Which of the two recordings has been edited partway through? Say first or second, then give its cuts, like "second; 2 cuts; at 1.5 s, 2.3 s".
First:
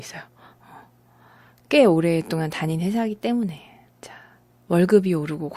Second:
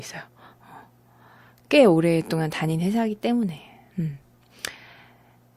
first; 1 cut; at 3.9 s